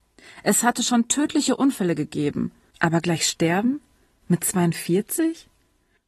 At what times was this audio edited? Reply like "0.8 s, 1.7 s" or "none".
2.7 s

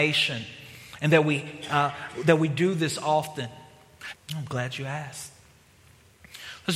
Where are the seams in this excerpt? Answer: 4.1 s

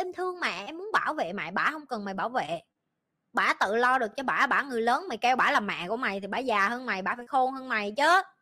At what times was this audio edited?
none

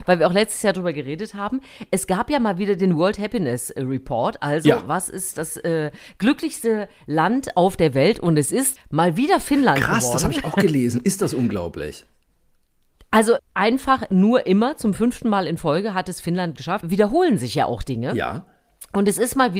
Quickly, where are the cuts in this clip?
8.8 s, 13.4 s, 16.8 s

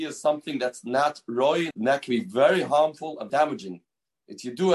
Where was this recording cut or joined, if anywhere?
1.7 s, 3.3 s

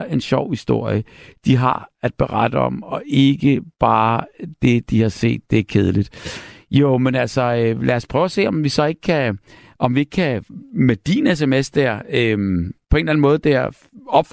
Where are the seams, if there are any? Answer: none

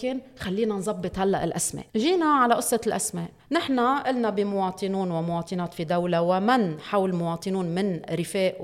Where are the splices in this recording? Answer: 1.9 s, 3.4 s

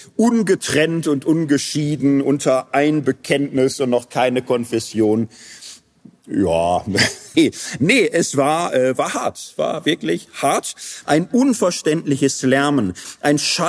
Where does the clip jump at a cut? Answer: 7.3 s, 11.0 s

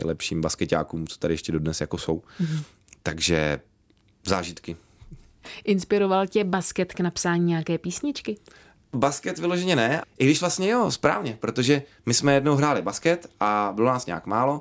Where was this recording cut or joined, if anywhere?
none

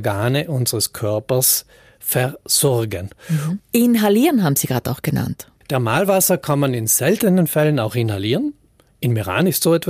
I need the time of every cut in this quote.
3.6 s, 5.6 s

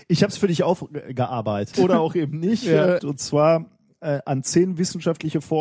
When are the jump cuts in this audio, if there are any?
1.7 s, 3.0 s

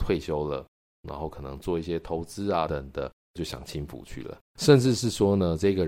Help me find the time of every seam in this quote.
2.7 s, 4.5 s

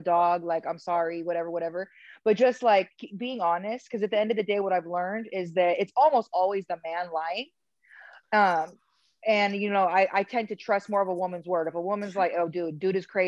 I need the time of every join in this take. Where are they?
none

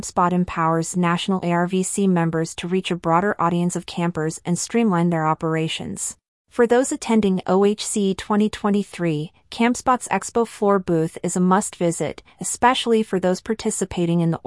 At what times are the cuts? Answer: 6.4 s

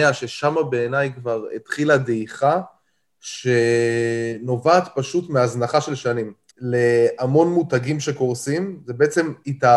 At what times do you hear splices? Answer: 6.5 s

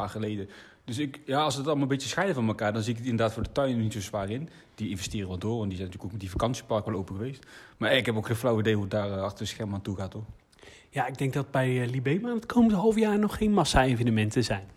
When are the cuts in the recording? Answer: none

